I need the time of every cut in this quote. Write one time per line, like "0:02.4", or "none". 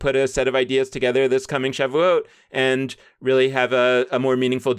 none